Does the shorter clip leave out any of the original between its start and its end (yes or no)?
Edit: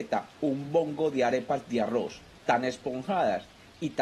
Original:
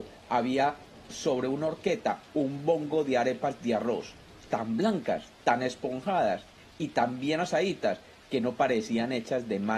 yes